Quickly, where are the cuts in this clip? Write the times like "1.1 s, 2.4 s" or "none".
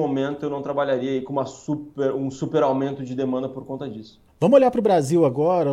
4.3 s